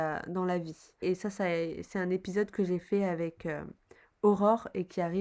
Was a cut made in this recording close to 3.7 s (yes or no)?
no